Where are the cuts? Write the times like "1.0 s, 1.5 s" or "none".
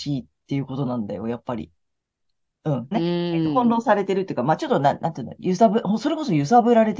2.9 s